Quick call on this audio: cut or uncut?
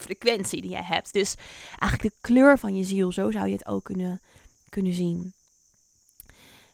uncut